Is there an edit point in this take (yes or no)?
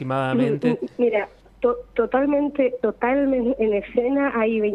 no